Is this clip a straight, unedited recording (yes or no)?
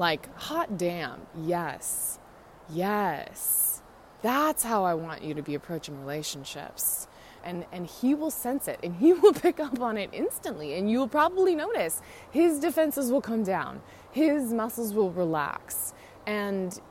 no